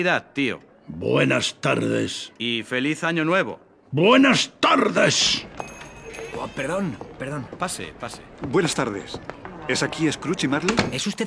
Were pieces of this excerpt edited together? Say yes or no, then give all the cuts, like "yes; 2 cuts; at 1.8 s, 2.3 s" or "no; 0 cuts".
no; 0 cuts